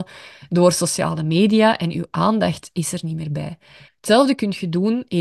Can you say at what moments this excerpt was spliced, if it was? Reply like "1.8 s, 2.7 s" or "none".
3.9 s